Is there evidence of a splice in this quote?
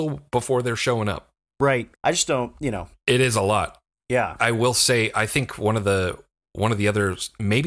yes; 2 cuts; at 1.9 s, 4.4 s

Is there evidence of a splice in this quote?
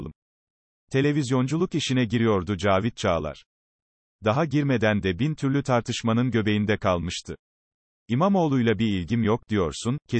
yes; 1 cut; at 8.0 s

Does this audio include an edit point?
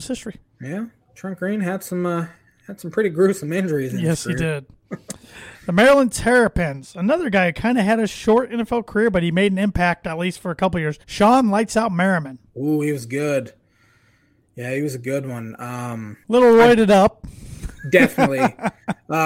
yes; 2 cuts; at 11.0 s, 16.2 s

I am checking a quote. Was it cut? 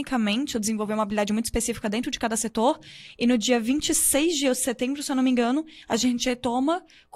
no; 0 cuts

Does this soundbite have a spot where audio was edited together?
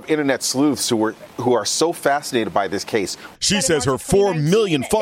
yes; 1 cut; at 3.3 s

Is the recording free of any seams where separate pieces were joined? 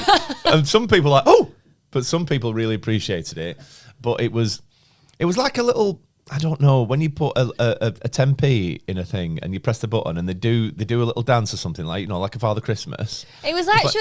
yes; 0 cuts

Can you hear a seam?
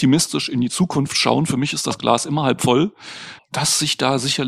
yes; 1 cut; at 3.4 s

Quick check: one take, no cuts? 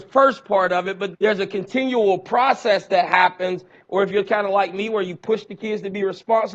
no; 2 cuts; at 1.1 s, 3.8 s

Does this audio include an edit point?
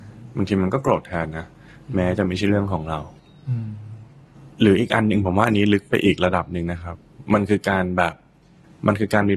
no; 0 cuts

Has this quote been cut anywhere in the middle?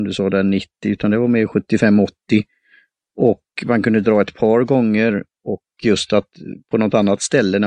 no; 0 cuts

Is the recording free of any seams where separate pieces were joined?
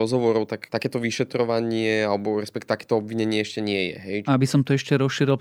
no; 1 cut; at 4.2 s

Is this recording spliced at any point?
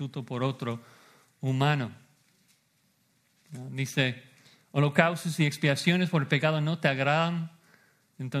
no; 0 cuts

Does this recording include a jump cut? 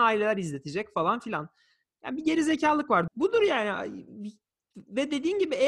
yes; 1 cut; at 3.1 s

